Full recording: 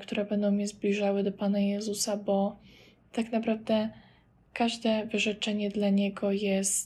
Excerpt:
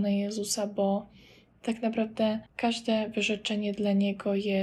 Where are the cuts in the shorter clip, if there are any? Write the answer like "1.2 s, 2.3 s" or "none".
2.5 s